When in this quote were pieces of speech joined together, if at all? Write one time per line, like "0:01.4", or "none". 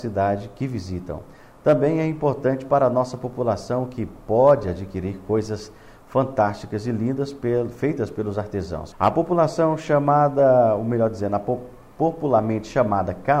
0:08.9